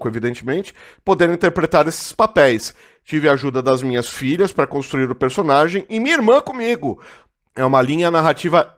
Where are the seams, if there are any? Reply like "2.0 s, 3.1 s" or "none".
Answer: 7.5 s